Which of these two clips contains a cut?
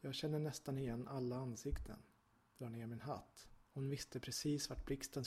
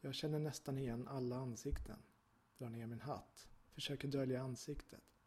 first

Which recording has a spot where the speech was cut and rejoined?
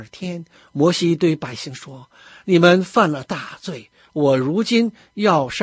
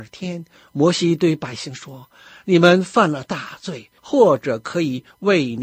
second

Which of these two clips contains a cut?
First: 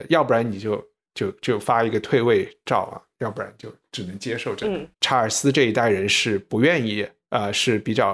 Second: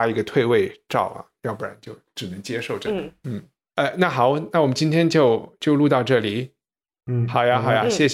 first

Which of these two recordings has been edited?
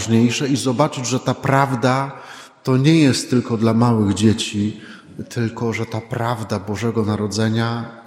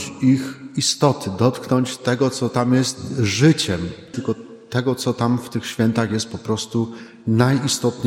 second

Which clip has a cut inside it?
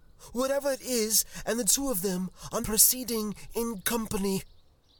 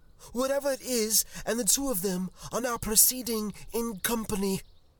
first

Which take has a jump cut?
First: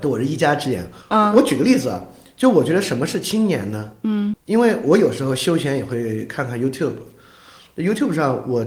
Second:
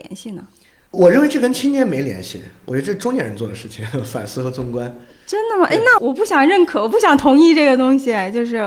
second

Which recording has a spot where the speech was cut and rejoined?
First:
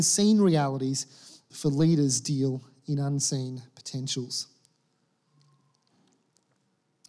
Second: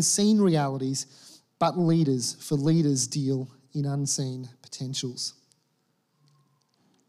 first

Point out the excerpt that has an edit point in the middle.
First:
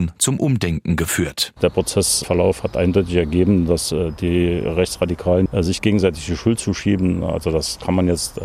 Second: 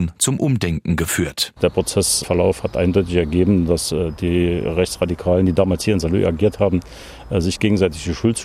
first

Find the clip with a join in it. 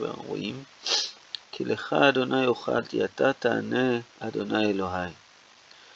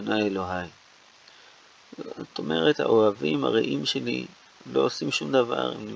first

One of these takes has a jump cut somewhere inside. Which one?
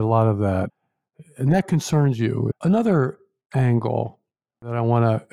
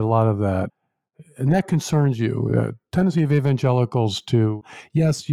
first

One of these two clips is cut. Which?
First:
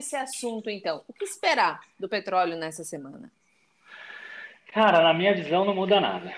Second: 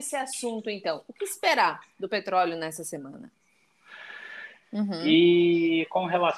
second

